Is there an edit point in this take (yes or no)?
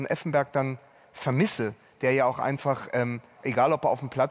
yes